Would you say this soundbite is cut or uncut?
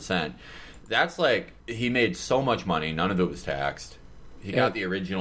cut